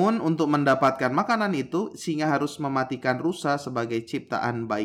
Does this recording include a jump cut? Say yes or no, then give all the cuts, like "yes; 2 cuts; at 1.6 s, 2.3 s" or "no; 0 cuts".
no; 0 cuts